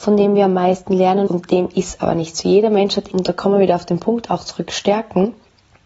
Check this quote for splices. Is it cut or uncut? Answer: cut